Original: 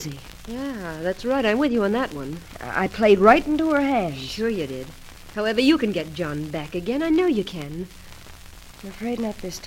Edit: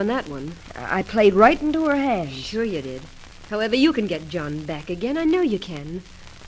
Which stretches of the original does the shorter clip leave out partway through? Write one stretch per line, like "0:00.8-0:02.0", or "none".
none